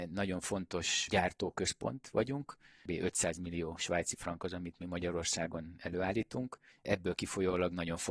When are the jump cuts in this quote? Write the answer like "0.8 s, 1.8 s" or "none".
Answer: 2.9 s, 6.7 s